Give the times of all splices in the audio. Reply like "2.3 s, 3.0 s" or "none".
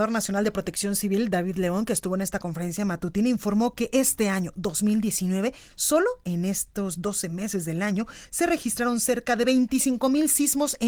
none